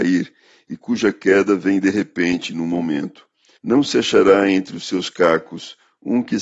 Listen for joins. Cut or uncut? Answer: cut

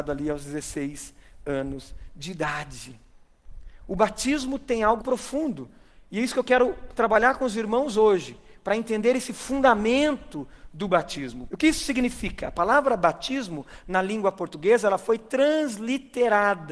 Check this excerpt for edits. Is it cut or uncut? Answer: cut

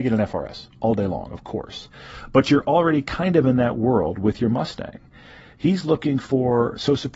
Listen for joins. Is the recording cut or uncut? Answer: uncut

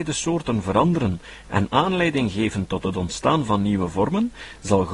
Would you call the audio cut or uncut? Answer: uncut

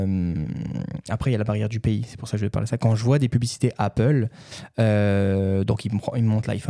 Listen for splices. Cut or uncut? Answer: uncut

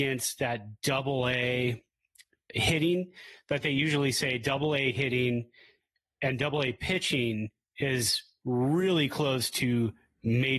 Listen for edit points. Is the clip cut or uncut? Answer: uncut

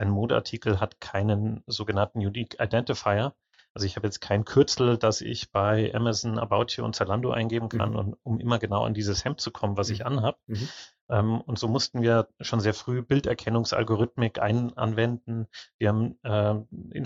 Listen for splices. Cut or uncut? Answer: uncut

